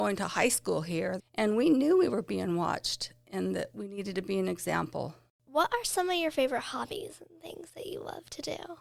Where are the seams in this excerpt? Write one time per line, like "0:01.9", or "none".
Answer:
0:01.2